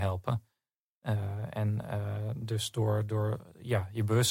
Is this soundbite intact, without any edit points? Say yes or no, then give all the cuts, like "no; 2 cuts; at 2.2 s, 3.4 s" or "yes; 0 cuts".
yes; 0 cuts